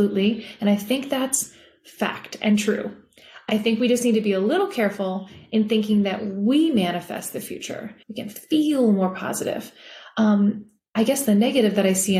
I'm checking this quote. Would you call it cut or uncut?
cut